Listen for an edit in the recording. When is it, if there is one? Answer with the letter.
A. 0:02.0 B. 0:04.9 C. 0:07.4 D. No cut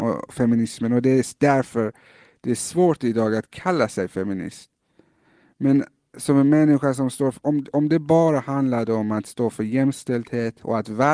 D